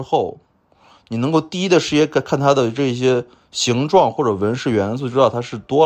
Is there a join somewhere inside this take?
no; 0 cuts

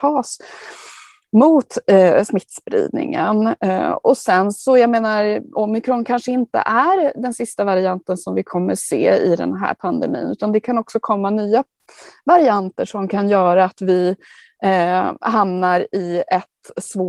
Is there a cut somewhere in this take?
no; 0 cuts

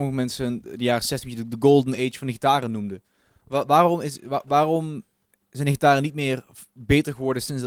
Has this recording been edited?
no; 0 cuts

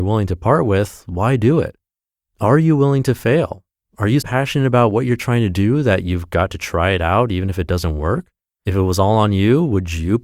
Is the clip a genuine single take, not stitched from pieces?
no; 2 cuts; at 4.2 s, 8.6 s

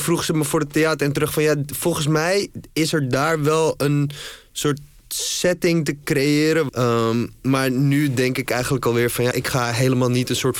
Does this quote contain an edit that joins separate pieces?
yes; 2 cuts; at 6.7 s, 9.3 s

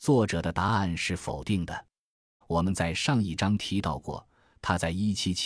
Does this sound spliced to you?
yes; 1 cut; at 2.4 s

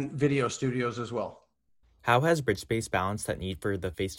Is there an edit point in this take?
yes; 1 cut; at 2.0 s

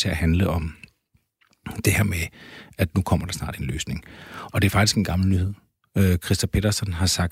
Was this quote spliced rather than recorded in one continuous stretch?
no; 0 cuts

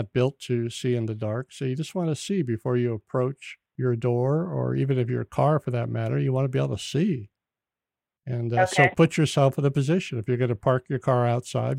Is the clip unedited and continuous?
yes; 0 cuts

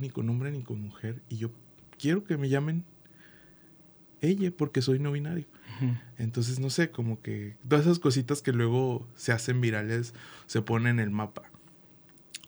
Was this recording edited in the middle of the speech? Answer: yes; 1 cut; at 6.9 s

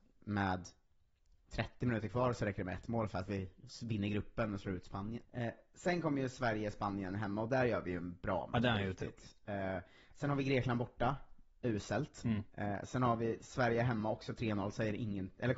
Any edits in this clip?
yes; 1 cut; at 5.2 s

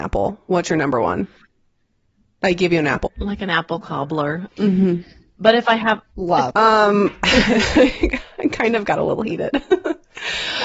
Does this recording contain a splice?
yes; 3 cuts; at 3.1 s, 4.5 s, 6.5 s

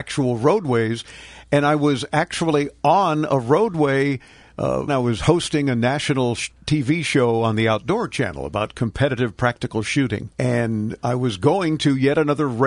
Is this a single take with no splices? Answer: no; 2 cuts; at 4.9 s, 10.3 s

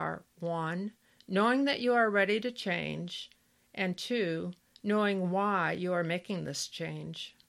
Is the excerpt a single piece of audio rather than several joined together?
yes; 0 cuts

